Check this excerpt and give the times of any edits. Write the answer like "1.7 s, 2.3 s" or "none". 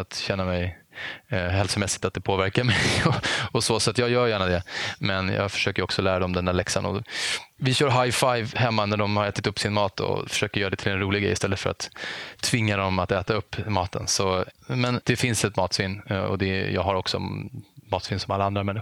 none